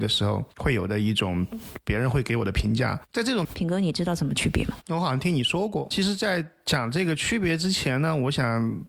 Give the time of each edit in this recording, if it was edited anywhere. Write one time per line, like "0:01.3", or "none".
0:03.4
0:05.9